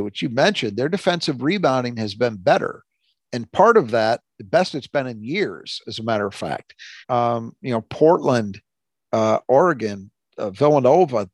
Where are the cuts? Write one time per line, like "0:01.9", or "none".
0:07.0